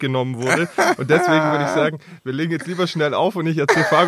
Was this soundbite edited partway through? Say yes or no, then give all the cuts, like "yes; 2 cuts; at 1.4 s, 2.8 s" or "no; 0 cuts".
no; 0 cuts